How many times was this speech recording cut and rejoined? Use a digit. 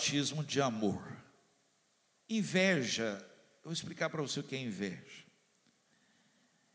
1